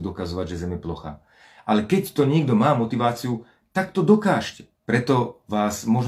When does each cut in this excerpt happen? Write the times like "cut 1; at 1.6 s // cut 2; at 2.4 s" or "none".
cut 1; at 4.8 s